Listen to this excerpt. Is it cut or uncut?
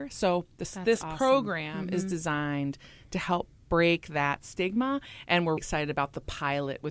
cut